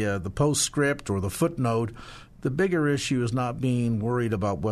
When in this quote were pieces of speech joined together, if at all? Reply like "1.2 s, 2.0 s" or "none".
none